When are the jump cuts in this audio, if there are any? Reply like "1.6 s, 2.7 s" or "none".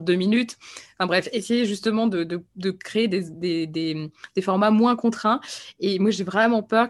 none